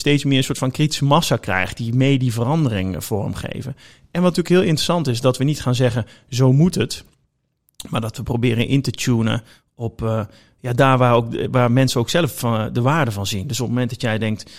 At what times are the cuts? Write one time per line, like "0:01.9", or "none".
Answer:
none